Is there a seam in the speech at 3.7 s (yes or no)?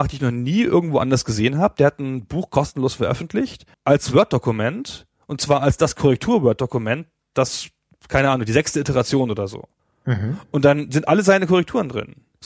yes